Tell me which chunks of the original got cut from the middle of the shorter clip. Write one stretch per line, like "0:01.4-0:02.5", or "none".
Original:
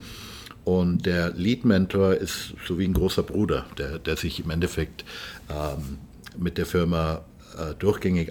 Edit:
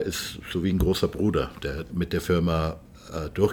0:04.0-0:06.3